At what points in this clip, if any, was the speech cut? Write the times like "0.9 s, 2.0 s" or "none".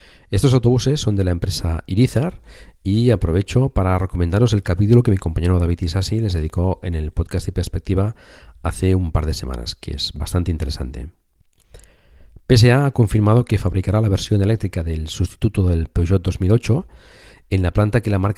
none